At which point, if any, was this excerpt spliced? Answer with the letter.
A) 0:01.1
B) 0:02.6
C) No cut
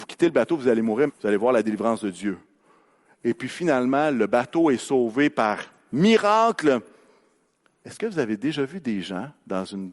A